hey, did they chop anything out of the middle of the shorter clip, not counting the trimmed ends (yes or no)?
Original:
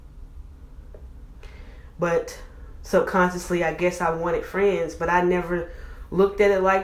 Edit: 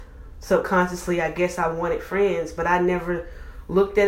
no